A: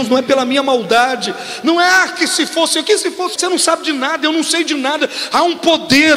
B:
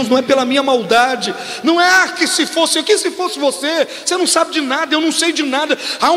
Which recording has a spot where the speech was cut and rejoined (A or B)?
A